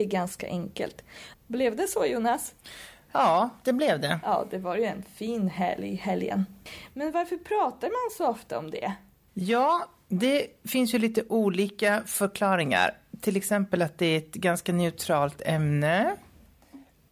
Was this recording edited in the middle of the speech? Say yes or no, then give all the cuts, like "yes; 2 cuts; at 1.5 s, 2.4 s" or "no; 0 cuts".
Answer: yes; 1 cut; at 1.3 s